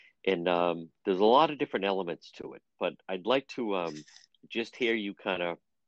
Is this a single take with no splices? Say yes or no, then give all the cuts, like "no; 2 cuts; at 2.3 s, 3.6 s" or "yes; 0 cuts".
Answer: yes; 0 cuts